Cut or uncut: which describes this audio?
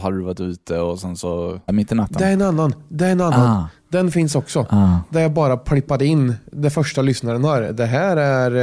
cut